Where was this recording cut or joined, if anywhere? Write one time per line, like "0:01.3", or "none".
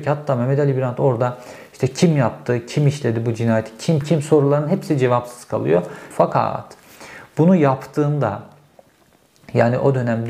0:04.0
0:06.1

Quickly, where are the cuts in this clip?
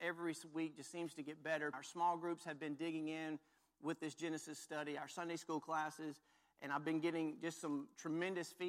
0:01.7

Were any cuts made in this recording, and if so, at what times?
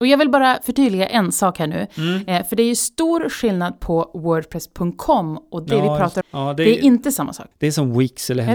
0:06.2
0:07.5

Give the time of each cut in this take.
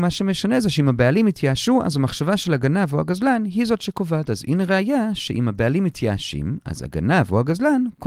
none

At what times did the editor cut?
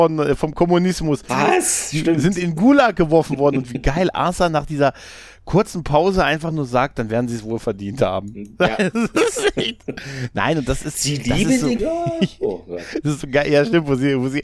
0:01.3
0:11.8

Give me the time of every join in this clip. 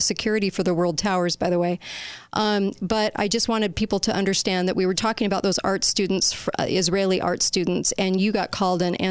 0:04.9

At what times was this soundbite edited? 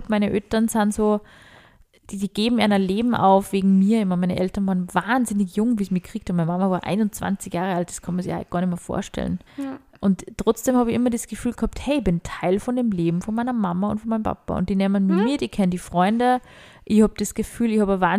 0:09.5

